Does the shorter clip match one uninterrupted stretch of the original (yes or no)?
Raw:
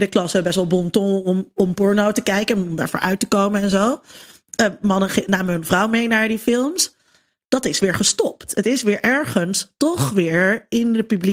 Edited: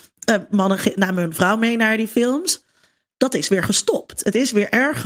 yes